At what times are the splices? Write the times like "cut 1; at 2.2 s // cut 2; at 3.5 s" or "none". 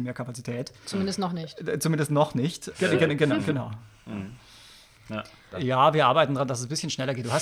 cut 1; at 2.7 s // cut 2; at 5.5 s